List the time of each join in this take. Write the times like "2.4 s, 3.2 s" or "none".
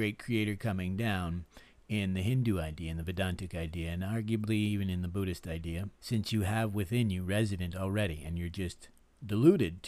5.9 s